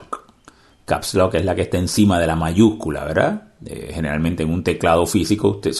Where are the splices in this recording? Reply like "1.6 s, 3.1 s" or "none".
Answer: none